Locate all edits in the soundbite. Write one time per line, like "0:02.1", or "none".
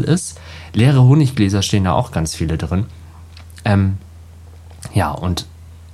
none